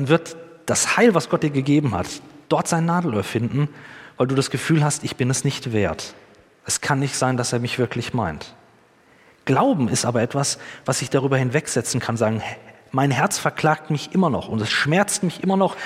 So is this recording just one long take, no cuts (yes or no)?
yes